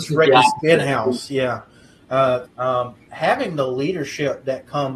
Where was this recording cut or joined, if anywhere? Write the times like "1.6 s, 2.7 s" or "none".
2.4 s